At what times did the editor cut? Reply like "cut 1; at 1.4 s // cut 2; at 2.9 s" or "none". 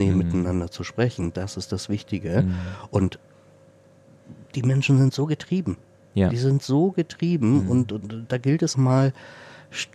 cut 1; at 8.7 s

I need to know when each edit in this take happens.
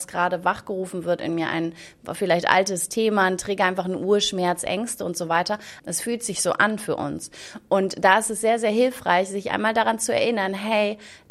cut 1; at 5.8 s

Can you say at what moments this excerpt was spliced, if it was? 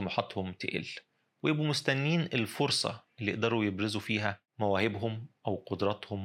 cut 1; at 4.5 s

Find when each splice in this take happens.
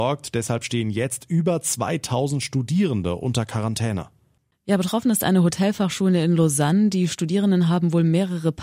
none

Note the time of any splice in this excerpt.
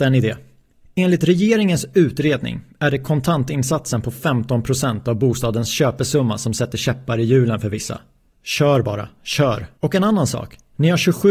cut 1; at 8.3 s // cut 2; at 9.8 s

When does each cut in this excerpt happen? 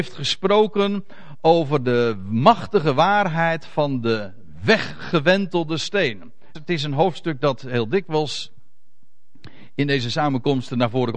cut 1; at 6.5 s

